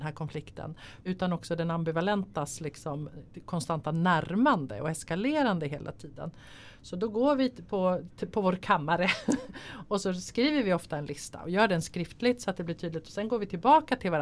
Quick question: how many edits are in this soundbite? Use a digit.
1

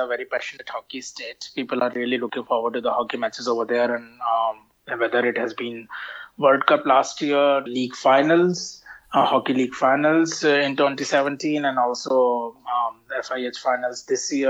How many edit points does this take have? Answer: 1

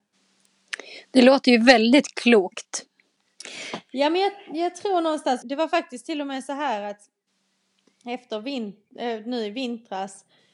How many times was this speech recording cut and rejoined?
1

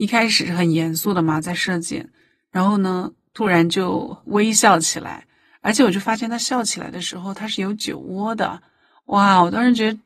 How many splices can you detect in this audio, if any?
0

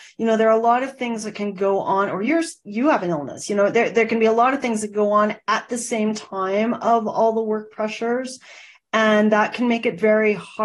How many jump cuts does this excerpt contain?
0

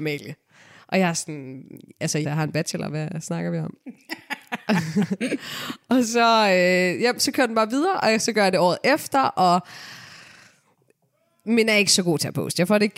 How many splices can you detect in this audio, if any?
1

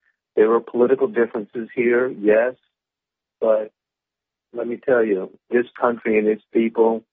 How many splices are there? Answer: 1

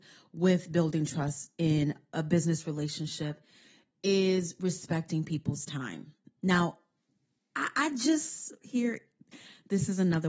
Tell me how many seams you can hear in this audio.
1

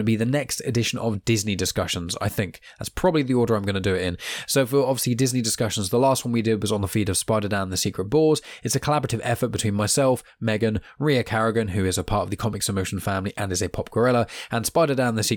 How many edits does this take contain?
0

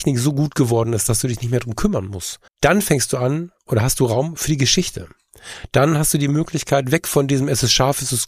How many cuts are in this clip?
1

